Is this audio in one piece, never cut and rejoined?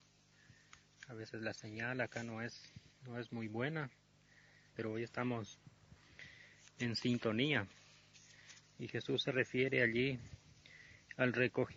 no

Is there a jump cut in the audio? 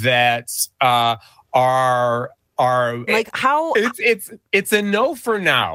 yes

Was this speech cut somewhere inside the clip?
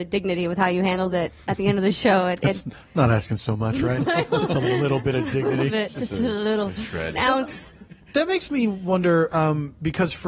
no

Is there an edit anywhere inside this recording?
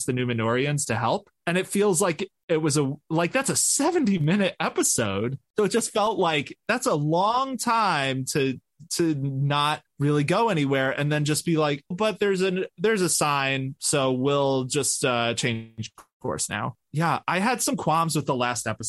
yes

